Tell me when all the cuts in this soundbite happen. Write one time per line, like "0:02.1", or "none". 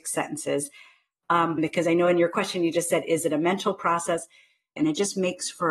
0:01.6
0:04.8

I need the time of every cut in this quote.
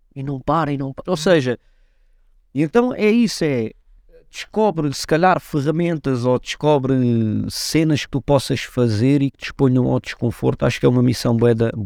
0:01.1

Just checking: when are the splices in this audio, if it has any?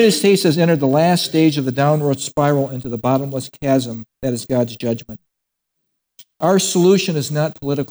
none

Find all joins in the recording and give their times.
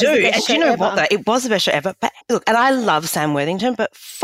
0:02.2

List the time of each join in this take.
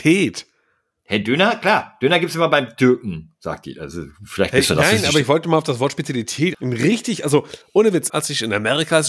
0:06.5
0:08.1

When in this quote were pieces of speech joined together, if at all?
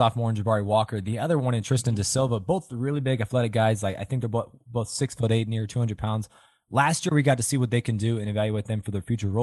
none

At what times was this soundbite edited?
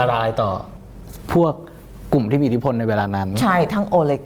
none

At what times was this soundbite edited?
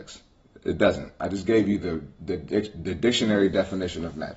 none

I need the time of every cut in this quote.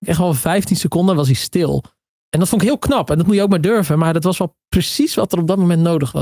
none

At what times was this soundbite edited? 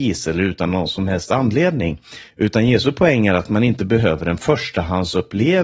none

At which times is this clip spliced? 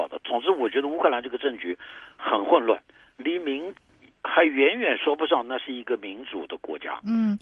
none

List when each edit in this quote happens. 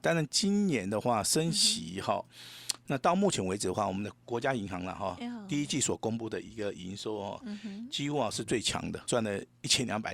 0:04.1
0:09.1

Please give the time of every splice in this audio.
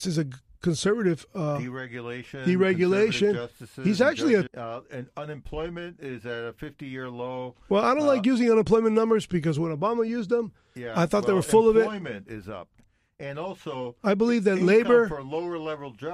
0:04.5

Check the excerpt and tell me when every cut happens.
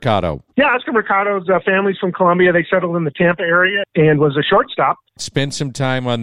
0:03.8
0:05.2

